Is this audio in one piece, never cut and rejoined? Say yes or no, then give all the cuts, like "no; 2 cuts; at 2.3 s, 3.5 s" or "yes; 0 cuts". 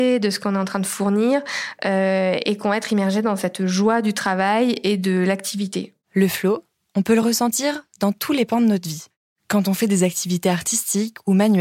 no; 1 cut; at 6.0 s